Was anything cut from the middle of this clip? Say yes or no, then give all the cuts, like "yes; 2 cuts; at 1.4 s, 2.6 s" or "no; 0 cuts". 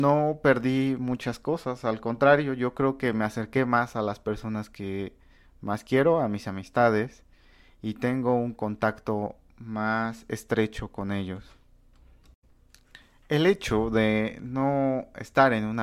no; 0 cuts